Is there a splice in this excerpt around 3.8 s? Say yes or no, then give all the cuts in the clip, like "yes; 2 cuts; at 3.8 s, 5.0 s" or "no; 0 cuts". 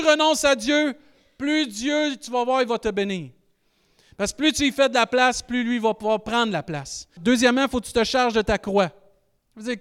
no; 1 cut; at 7.2 s